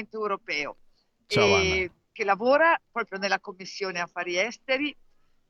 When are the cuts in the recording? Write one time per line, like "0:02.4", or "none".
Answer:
none